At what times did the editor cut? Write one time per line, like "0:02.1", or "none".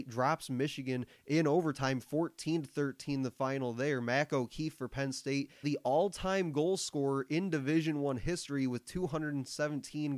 0:05.6

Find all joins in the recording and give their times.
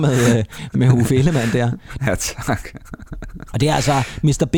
0:02.0

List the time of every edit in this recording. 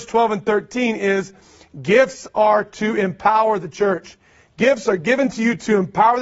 none

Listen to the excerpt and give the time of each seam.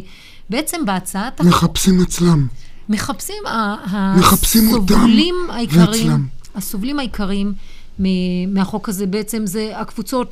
none

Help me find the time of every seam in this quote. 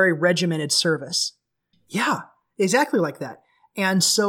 0:01.7

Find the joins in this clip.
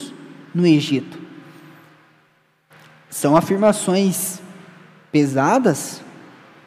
none

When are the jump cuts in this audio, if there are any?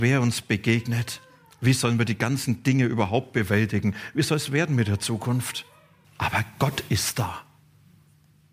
0:06.0

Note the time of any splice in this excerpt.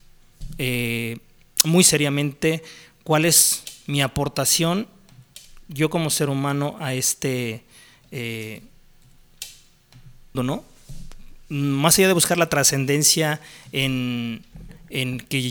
0:10.3

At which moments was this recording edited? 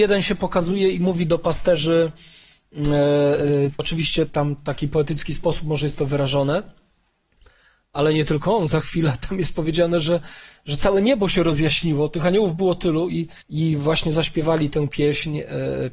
0:03.8
0:13.4

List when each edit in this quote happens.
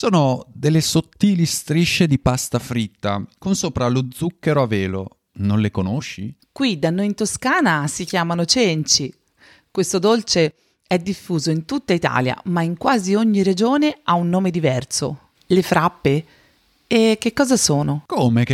0:06.4
0:15.3

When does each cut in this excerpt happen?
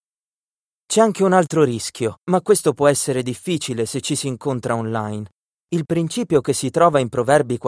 0:02.2
0:05.6

